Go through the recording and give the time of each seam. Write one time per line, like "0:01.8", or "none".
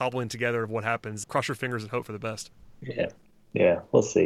0:01.2
0:02.7